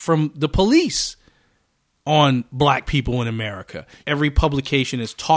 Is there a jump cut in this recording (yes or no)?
yes